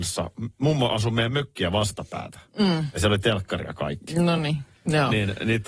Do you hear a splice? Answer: no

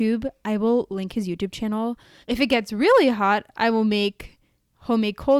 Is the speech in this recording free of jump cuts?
no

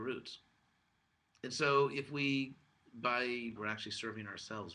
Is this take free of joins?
no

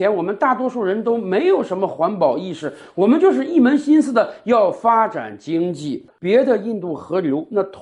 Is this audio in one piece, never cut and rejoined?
no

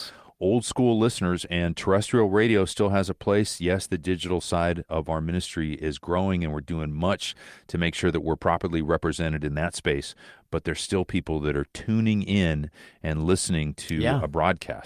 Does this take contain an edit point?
no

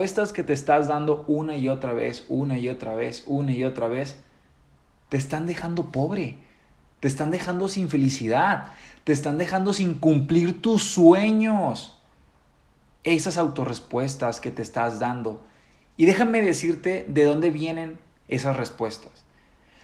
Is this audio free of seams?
yes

